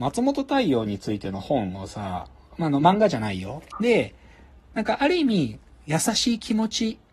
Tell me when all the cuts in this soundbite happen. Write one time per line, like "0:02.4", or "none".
0:03.7